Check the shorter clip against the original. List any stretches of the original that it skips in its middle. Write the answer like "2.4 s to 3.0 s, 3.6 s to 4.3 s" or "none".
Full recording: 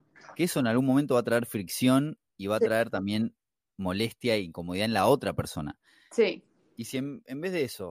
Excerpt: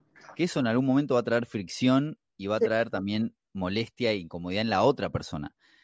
3.4 s to 3.7 s